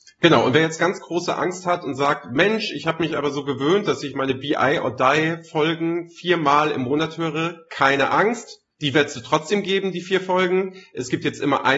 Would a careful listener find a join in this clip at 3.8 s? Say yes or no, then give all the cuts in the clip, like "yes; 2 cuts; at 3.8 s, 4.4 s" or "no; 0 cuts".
no; 1 cut; at 8.7 s